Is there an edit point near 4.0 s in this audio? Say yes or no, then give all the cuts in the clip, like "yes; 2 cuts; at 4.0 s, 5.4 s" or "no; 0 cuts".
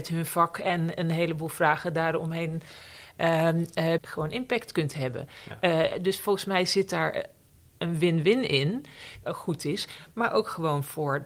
yes; 2 cuts; at 4.0 s, 9.2 s